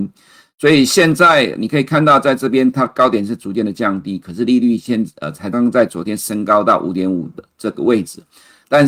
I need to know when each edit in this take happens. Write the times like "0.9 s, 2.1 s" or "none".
5.5 s